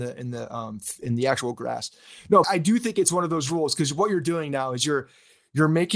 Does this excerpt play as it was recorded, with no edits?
no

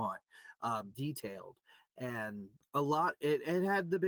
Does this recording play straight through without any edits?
no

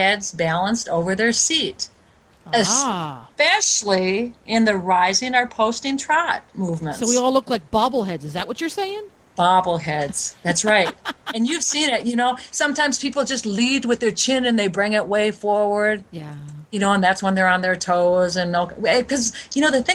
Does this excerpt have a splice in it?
no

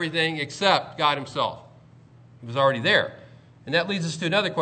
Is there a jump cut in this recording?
no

